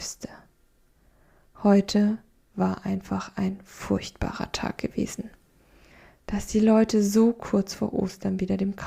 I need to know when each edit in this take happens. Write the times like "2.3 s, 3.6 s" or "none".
none